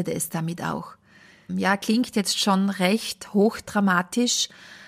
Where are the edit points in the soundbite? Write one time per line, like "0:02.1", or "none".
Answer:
0:01.5